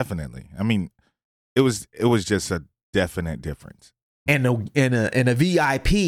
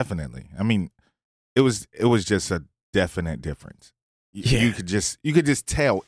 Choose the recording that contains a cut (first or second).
first